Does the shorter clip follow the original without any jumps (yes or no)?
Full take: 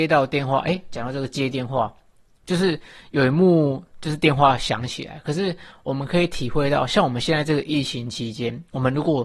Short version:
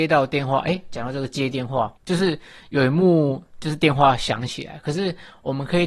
no